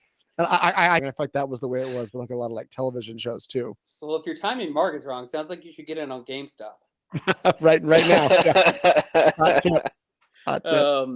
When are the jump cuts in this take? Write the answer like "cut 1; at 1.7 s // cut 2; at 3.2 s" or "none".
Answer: cut 1; at 1.0 s